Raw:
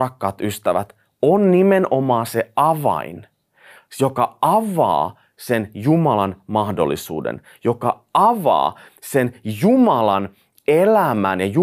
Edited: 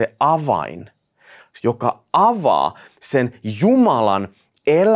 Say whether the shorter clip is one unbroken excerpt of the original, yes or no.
no